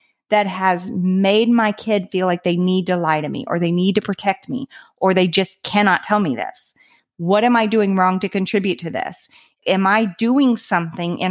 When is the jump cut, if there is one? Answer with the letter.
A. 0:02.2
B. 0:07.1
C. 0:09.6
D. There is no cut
B